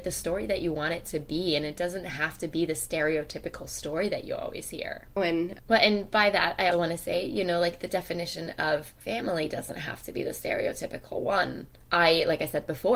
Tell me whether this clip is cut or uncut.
cut